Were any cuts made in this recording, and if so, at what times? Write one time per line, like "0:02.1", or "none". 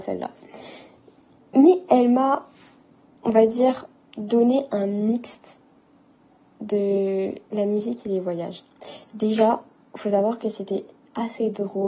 none

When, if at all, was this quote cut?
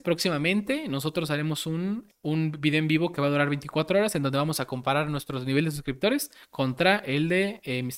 0:02.1

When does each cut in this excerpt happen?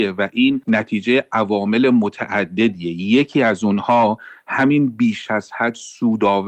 none

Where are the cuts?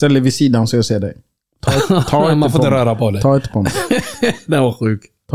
none

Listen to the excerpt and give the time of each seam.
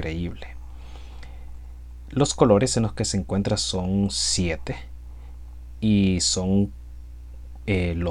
none

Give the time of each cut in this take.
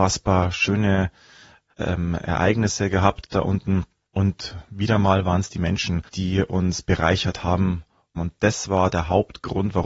0:06.1

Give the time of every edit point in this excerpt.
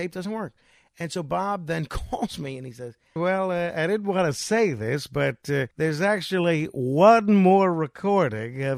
0:03.2
0:05.7

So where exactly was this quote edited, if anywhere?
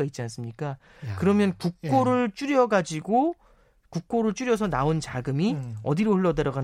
none

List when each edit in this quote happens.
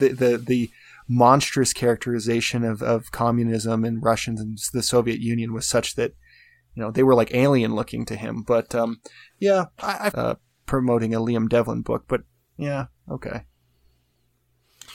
0:10.1

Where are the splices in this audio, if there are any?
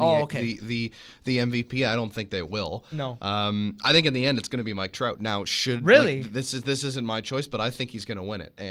none

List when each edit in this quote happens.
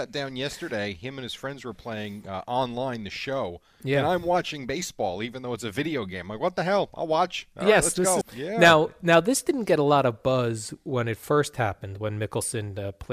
0:08.2

